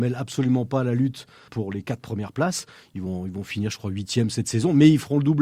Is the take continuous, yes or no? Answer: no